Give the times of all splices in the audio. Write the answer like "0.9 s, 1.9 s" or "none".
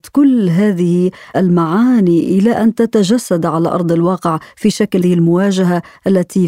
5.0 s

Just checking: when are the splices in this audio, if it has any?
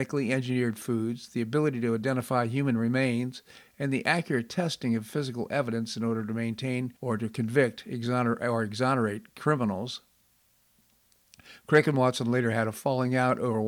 3.6 s, 7.0 s

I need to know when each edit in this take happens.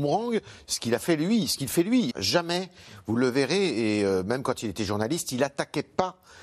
2.1 s

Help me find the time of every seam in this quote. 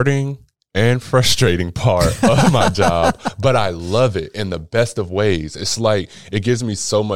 none

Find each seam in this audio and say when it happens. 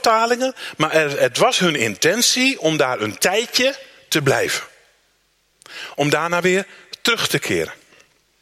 none

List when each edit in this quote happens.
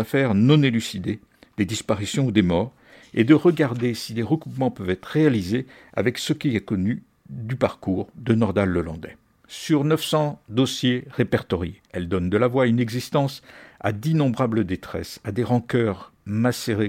11.9 s

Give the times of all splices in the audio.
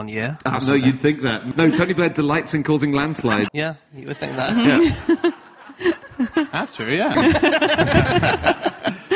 1.5 s, 3.5 s, 7.1 s

